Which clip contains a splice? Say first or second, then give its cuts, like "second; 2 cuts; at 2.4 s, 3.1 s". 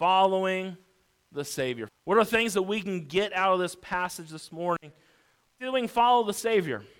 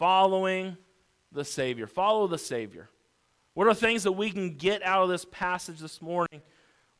first; 1 cut; at 1.9 s